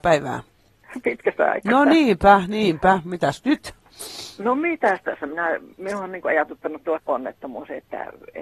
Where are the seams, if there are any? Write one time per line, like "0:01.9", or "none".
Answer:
none